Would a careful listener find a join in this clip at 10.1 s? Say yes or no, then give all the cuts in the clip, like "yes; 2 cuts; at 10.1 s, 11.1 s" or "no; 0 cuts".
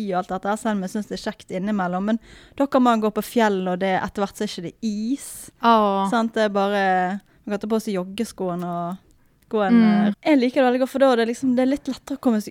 yes; 1 cut; at 10.1 s